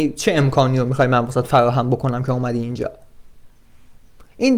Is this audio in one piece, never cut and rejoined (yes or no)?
yes